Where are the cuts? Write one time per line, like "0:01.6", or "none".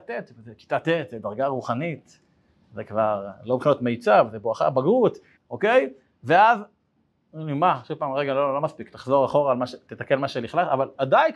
0:05.4